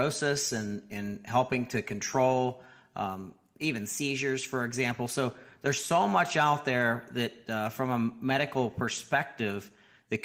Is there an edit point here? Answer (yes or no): no